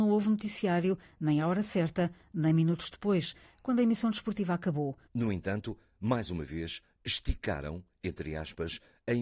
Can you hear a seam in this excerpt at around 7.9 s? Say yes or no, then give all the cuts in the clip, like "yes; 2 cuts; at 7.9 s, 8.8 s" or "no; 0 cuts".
no; 1 cut; at 5.1 s